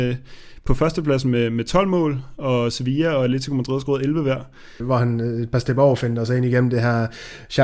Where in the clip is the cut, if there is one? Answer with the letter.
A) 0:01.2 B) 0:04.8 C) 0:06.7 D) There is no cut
B